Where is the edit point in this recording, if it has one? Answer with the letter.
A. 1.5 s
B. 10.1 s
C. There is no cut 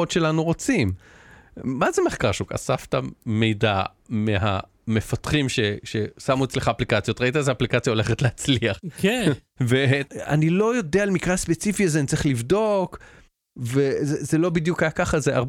B